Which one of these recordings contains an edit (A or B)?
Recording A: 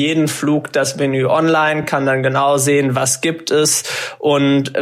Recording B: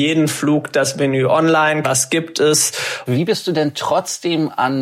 B